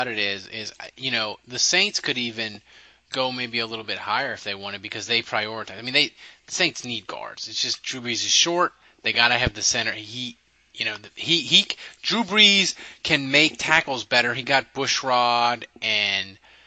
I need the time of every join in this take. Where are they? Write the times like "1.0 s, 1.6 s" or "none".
none